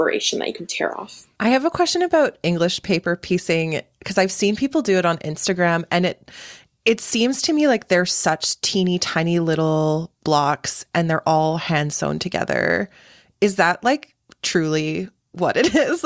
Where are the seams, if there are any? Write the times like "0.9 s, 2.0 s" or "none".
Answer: none